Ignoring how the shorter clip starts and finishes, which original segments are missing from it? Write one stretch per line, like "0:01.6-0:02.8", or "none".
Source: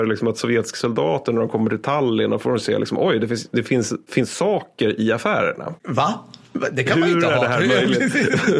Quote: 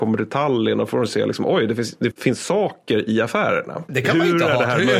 0:03.6-0:04.0
0:05.8-0:06.7